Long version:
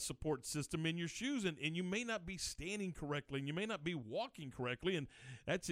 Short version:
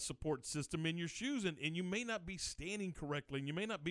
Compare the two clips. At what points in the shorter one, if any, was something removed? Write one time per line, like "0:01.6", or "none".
none